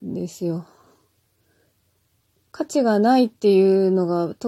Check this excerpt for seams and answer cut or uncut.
uncut